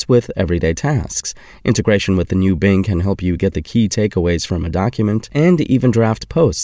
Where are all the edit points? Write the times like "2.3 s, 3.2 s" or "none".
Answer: 5.3 s

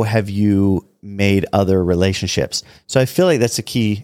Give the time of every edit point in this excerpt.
none

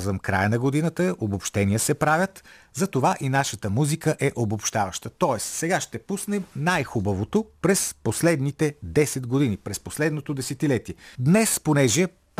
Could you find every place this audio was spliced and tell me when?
7.6 s, 11.1 s

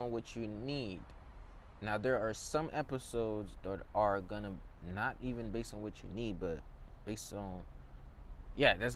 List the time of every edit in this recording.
none

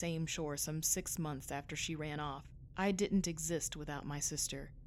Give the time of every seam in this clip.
2.7 s

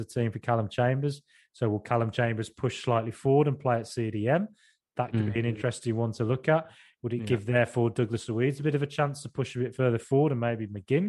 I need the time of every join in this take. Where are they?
none

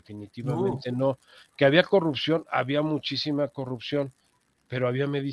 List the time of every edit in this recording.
none

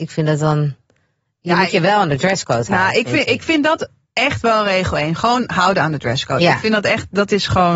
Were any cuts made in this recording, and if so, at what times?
none

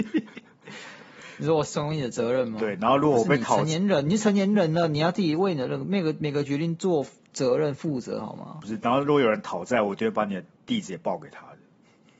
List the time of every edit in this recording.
none

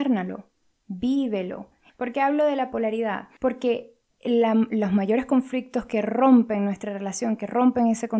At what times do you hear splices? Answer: 1.9 s

